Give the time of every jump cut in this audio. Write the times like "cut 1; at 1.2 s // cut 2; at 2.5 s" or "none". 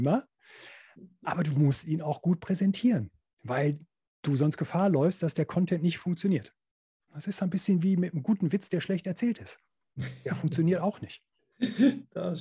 none